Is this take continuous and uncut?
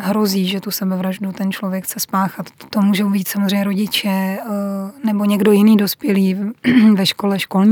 no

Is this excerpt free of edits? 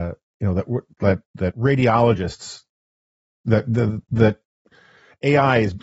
yes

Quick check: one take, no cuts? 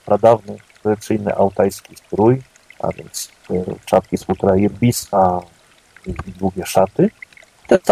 no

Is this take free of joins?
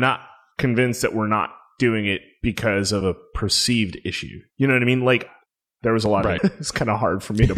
no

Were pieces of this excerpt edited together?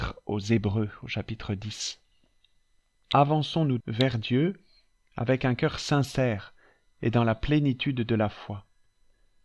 yes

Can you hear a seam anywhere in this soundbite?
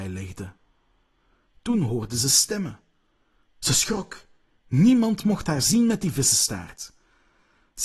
no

